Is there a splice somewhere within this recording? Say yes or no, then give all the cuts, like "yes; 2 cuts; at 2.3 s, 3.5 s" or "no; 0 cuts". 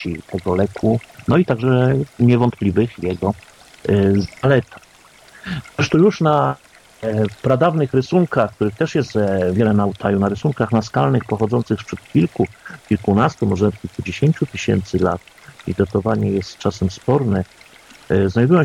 no; 0 cuts